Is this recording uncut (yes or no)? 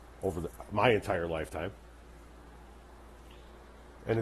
yes